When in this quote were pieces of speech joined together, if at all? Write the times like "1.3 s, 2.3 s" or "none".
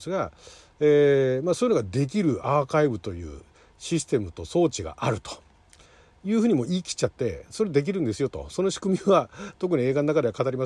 none